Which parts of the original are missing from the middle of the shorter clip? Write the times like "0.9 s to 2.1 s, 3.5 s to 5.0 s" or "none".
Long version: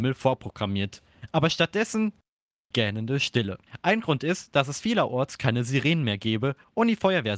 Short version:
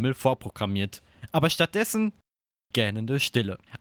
none